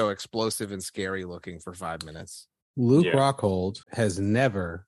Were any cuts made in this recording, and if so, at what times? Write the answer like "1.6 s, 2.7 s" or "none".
3.8 s